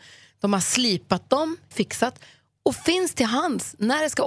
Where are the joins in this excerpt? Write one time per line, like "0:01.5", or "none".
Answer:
0:01.7

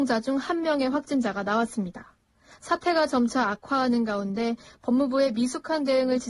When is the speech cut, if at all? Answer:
none

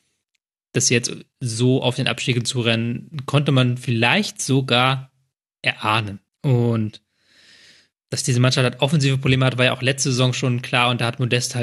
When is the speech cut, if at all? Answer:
0:06.3

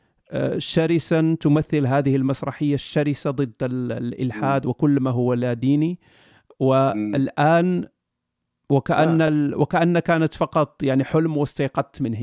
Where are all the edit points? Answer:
none

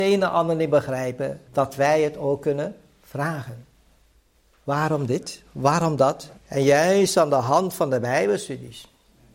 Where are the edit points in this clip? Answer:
0:01.5
0:06.4

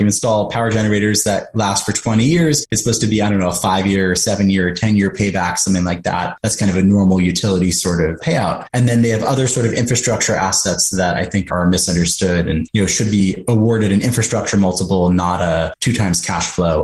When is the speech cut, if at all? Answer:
0:08.7

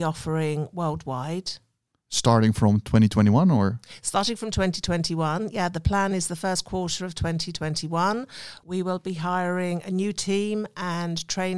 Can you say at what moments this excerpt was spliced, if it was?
none

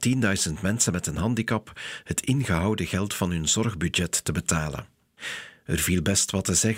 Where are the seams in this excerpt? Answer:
none

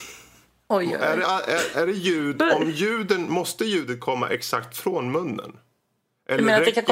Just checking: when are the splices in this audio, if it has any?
none

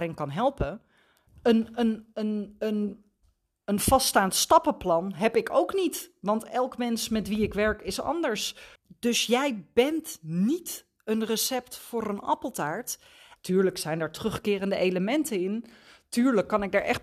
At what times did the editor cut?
0:01.3
0:08.8
0:13.4

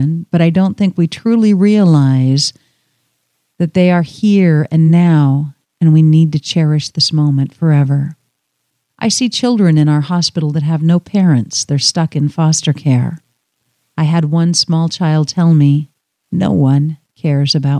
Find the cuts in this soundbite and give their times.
none

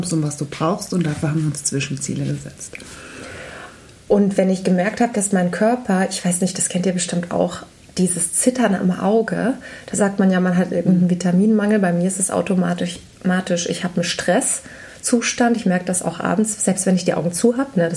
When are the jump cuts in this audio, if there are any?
none

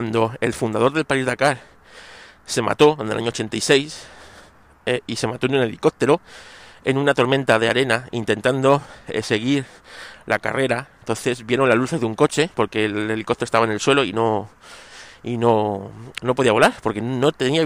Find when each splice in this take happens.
none

